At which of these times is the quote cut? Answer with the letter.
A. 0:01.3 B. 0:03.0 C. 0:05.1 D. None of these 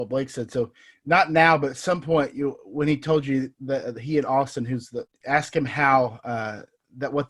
C